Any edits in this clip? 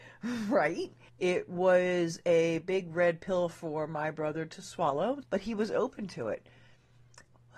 yes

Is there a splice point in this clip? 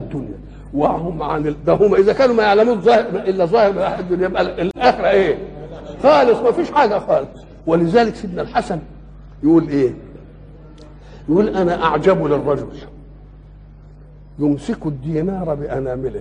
no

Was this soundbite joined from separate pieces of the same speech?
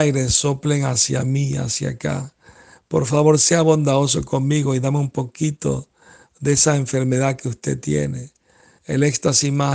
yes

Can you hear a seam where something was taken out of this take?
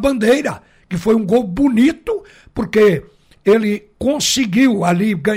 no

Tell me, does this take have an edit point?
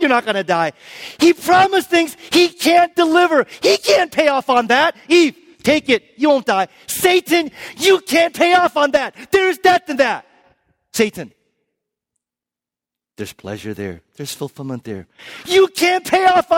no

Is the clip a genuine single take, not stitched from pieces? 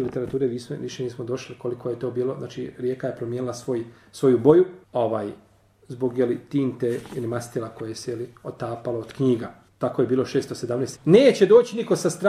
no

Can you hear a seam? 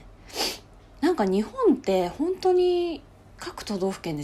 no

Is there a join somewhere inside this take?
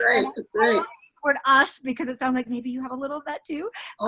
no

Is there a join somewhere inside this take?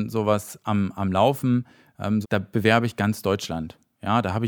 yes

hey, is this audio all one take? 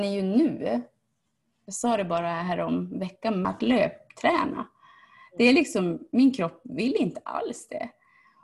no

